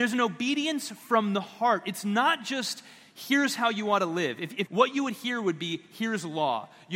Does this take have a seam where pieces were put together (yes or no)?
yes